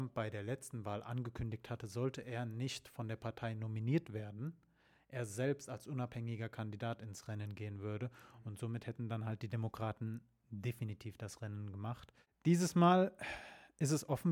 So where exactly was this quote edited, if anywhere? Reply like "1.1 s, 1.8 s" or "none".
none